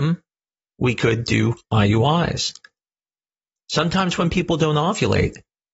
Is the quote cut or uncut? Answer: uncut